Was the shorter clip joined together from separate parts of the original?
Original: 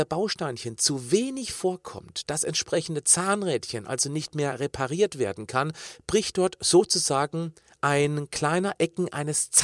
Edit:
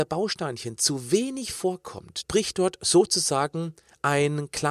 yes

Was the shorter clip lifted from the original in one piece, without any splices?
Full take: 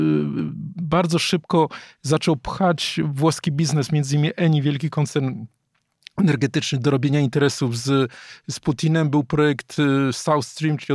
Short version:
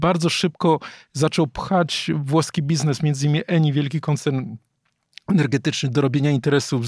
yes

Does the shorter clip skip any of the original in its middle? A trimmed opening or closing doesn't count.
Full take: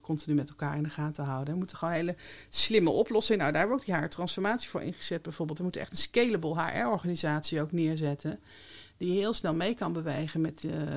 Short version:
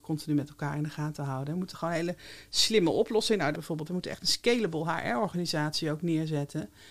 yes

